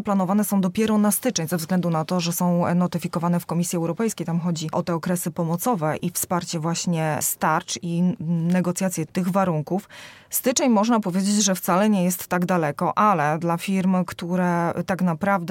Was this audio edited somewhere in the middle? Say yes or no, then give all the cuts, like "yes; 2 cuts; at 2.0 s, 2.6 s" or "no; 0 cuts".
no; 0 cuts